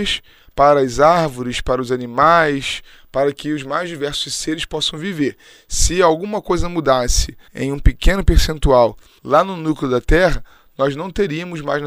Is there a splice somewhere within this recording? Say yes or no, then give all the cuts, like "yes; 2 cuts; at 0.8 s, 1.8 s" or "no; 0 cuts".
yes; 2 cuts; at 7.5 s, 9.2 s